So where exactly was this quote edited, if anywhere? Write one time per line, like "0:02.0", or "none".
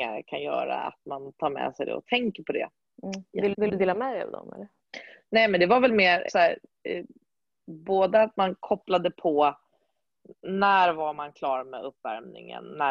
0:03.5
0:06.3